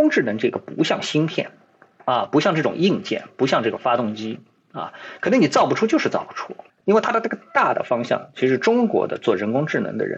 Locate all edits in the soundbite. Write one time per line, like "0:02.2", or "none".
0:06.8